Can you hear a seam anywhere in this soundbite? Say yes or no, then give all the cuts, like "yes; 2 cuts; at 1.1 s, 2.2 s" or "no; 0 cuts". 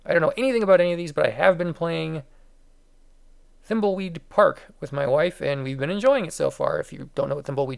no; 0 cuts